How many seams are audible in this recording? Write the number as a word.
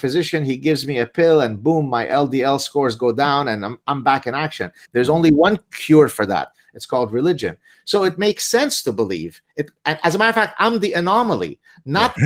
one